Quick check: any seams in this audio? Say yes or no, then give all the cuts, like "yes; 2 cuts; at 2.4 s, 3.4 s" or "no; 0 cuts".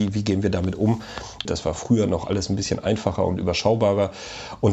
yes; 1 cut; at 1.4 s